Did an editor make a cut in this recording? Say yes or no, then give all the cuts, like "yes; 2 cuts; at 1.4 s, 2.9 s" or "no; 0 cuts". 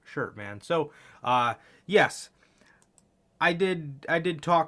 no; 0 cuts